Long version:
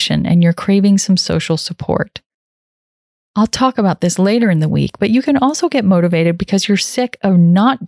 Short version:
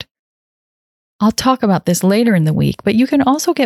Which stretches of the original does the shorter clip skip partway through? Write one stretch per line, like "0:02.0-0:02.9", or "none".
none